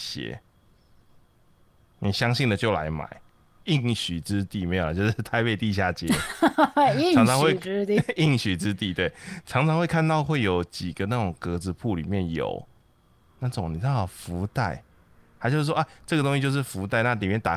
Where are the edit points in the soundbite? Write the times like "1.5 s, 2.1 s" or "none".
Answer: 3.6 s